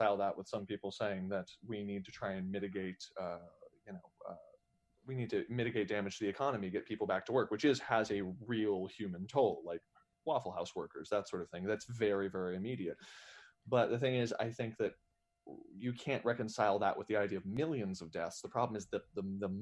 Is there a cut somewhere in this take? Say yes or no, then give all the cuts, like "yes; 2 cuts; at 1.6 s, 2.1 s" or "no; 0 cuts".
no; 0 cuts